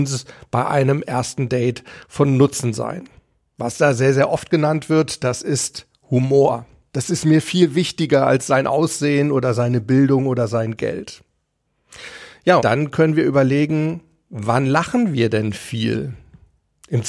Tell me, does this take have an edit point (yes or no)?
yes